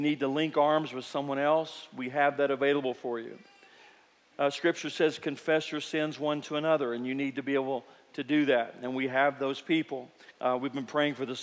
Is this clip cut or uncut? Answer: cut